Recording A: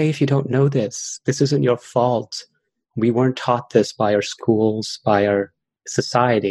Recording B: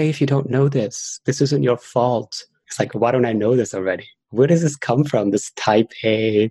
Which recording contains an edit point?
B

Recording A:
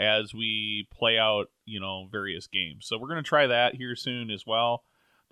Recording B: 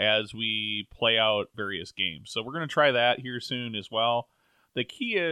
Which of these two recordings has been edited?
B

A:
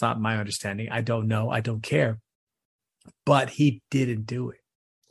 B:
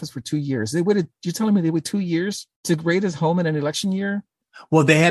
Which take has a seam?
B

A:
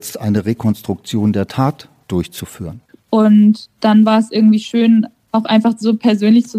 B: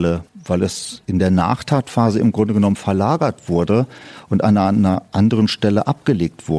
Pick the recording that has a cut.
A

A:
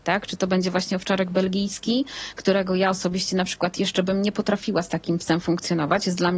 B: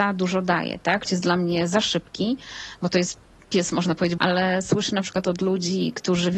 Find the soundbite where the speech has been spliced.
B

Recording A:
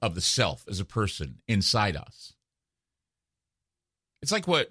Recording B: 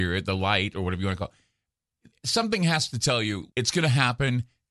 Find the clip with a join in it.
B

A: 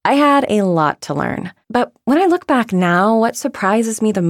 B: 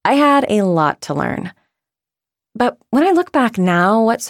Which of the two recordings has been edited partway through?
A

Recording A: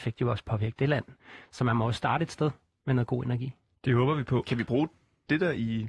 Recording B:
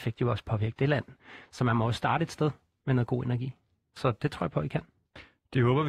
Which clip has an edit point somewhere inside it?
A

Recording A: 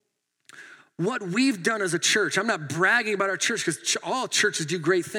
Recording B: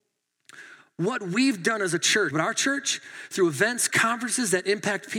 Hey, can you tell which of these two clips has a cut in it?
B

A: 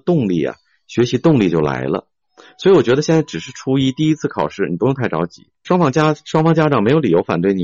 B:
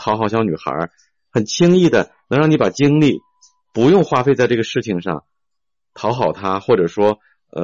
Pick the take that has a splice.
A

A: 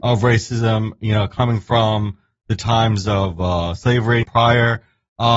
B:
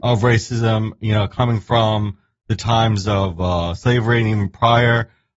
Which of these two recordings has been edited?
A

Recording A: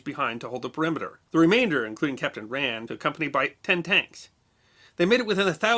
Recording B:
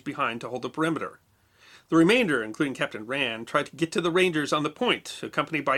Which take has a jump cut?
A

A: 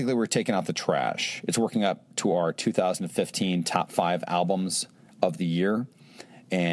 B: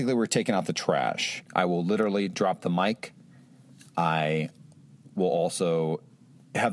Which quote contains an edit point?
B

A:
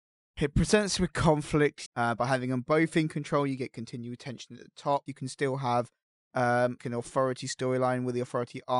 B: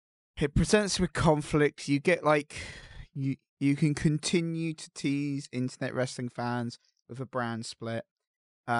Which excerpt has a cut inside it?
A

